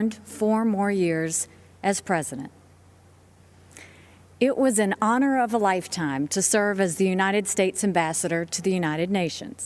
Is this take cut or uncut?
uncut